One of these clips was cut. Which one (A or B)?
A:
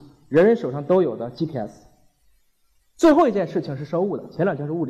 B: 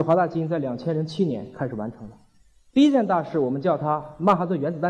B